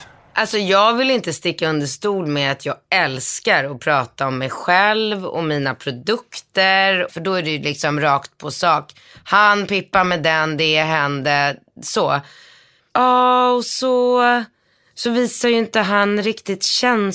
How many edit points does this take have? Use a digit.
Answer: 2